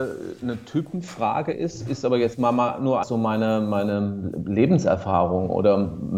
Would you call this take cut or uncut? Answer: cut